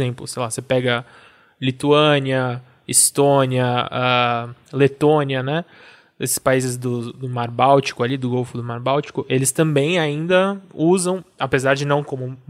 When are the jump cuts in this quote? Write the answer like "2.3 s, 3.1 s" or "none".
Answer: none